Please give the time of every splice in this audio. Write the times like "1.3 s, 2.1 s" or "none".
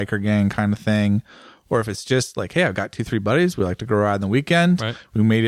none